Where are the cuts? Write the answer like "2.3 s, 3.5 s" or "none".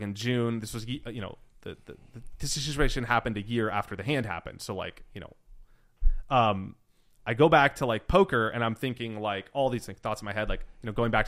none